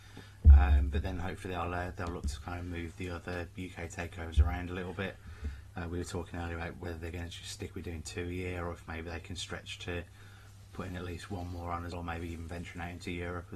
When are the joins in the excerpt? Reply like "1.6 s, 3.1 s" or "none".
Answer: 11.9 s